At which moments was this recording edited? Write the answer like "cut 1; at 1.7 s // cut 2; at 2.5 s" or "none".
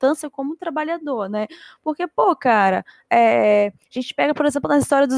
none

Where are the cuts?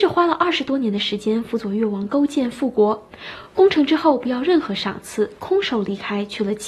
none

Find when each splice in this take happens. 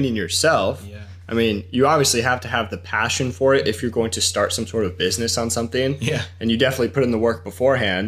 none

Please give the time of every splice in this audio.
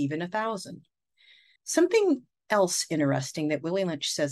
cut 1; at 1.6 s

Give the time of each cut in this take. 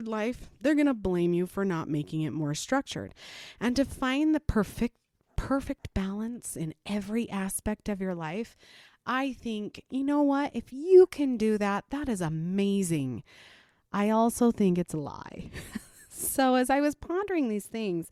none

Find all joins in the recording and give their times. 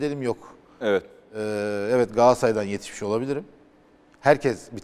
none

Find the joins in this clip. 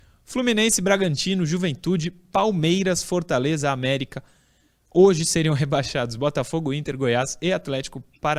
none

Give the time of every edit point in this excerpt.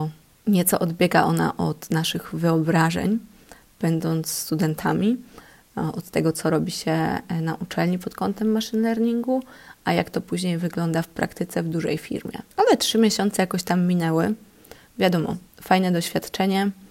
cut 1; at 12.5 s

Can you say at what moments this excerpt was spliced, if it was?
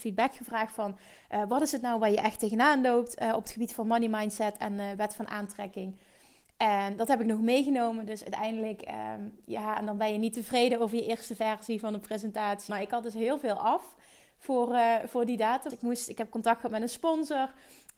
cut 1; at 12.7 s // cut 2; at 15.7 s

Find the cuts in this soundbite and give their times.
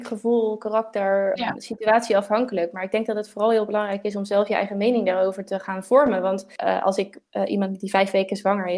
cut 1; at 1.4 s

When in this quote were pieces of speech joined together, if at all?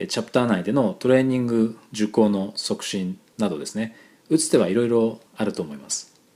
cut 1; at 5.3 s

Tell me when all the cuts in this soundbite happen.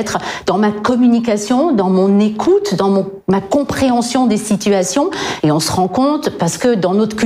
cut 1; at 5.4 s

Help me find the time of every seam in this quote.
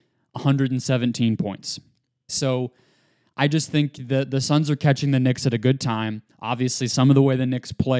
cut 1; at 2.3 s // cut 2; at 6.3 s

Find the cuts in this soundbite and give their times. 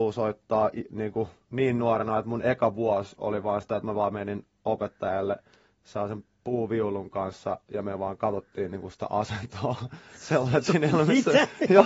none

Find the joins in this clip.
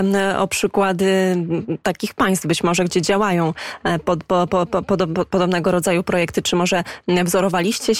none

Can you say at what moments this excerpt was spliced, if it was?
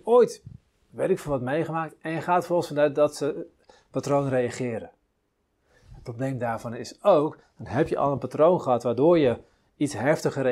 cut 1; at 7.4 s

